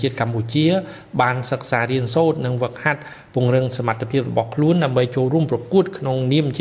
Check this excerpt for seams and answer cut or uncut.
uncut